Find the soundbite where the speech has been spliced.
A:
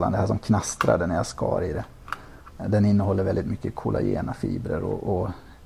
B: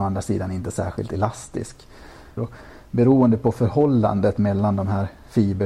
B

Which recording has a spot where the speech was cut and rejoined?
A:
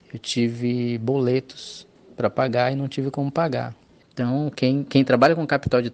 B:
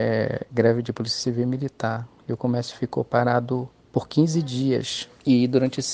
A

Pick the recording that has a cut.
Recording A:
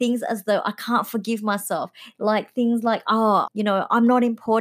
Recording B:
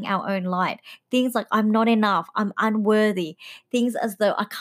A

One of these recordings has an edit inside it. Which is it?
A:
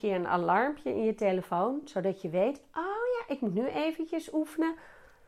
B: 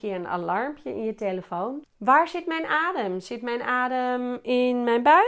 B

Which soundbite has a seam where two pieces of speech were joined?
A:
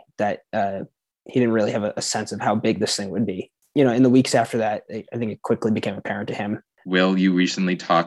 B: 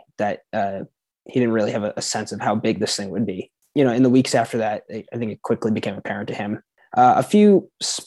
A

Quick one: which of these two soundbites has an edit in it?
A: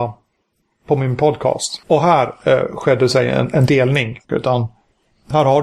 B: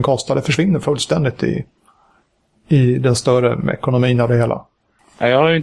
A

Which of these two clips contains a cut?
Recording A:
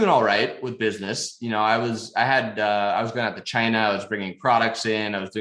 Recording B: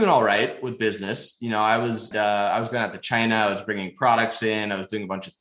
B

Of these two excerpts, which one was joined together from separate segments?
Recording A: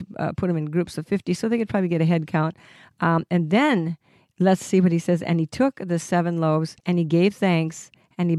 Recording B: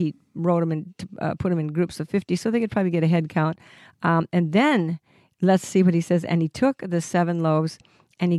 A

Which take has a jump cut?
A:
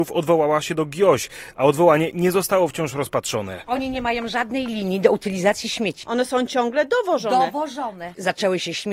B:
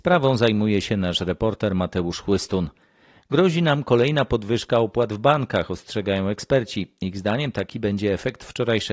A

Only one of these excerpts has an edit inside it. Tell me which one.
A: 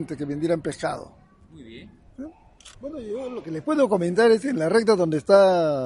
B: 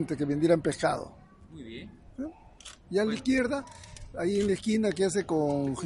A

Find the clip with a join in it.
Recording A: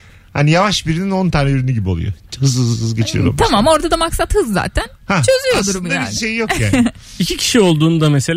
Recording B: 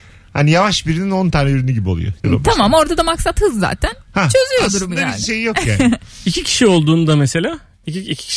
B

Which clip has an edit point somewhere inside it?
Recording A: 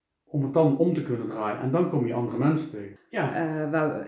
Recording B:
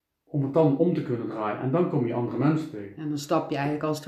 A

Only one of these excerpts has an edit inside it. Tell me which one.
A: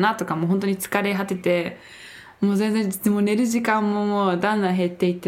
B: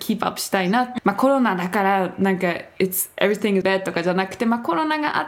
B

